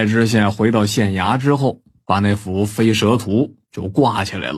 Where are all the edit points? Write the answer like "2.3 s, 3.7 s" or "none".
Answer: none